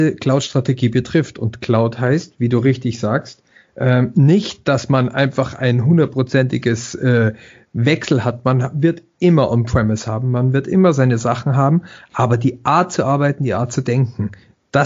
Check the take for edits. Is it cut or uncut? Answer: uncut